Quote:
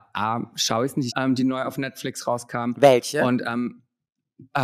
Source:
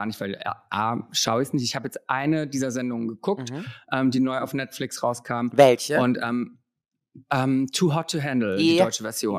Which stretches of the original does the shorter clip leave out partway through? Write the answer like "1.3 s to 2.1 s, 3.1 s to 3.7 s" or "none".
1.6 s to 3.8 s